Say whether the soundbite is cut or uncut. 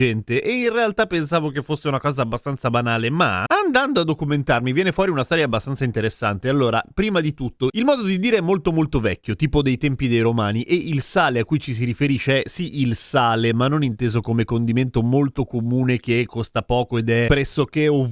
uncut